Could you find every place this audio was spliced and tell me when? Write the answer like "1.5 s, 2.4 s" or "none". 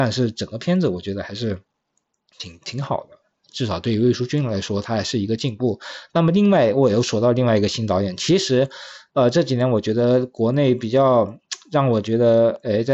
none